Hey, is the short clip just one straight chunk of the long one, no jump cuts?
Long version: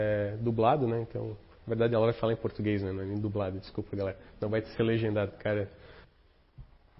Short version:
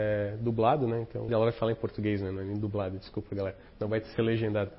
no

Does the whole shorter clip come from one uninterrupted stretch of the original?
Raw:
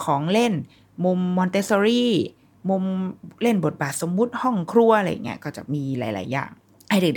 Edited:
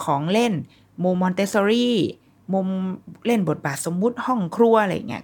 no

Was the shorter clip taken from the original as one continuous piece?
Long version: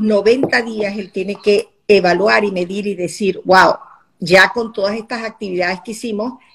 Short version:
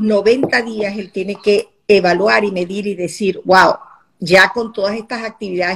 yes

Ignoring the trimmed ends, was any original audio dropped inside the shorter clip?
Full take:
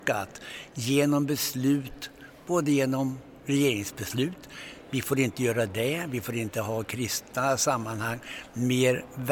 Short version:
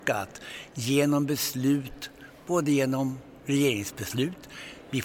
no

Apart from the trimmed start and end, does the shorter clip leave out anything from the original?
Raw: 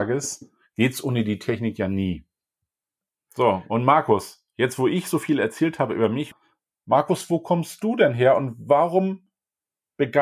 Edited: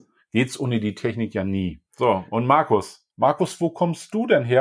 yes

